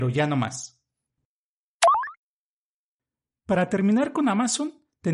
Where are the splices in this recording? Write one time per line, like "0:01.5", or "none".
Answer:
none